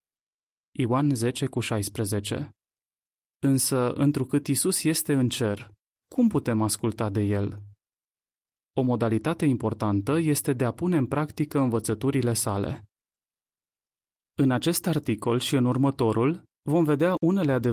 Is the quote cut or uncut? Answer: uncut